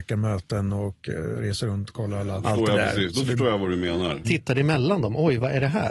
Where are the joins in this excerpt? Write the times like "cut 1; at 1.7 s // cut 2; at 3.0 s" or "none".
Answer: cut 1; at 2.4 s // cut 2; at 4.2 s